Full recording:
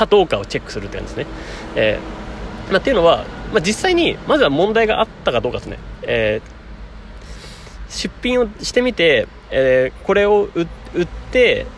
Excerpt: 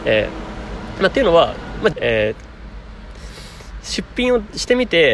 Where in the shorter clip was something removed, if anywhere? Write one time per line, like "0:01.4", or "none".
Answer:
0:01.9